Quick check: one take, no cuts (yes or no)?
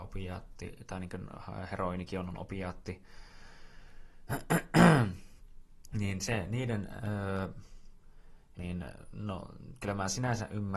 no